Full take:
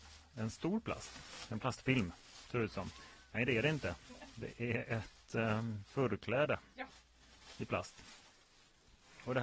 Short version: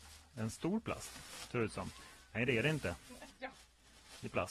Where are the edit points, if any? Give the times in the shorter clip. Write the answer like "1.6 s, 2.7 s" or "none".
1.5 s, 3.3 s